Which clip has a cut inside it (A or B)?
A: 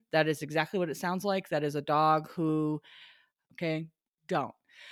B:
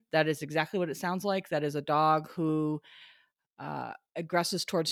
A